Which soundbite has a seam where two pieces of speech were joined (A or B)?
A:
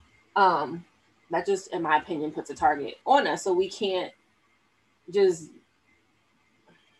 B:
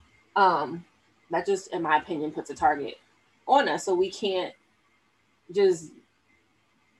A